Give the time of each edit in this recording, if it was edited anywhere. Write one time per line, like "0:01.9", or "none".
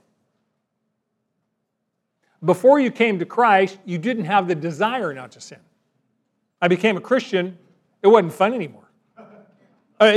0:06.5